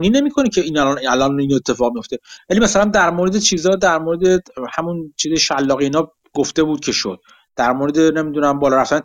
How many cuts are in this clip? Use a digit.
0